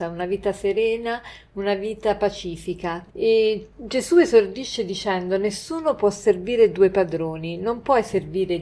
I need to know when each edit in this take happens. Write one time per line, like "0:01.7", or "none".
0:03.1